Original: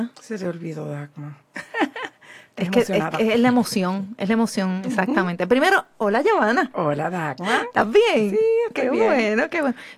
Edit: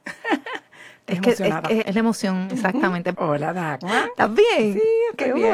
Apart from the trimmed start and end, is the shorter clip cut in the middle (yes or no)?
yes